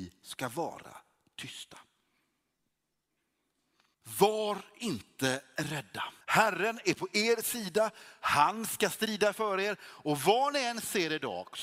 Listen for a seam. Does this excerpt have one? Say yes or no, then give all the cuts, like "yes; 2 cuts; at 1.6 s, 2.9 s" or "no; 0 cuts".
yes; 2 cuts; at 3.9 s, 6.2 s